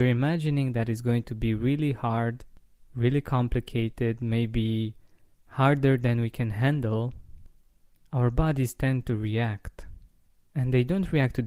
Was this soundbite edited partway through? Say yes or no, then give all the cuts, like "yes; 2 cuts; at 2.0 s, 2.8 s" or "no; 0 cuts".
no; 0 cuts